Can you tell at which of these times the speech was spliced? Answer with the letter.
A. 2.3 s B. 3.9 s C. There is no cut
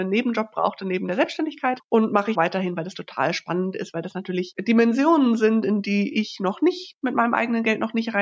A